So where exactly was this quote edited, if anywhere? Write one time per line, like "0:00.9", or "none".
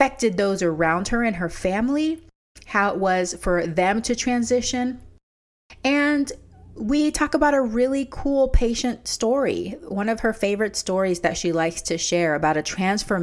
none